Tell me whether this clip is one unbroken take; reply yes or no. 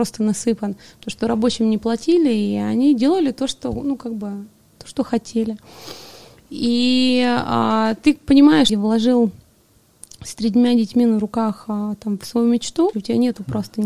no